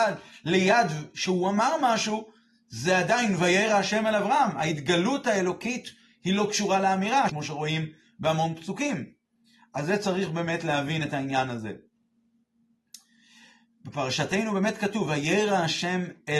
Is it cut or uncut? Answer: cut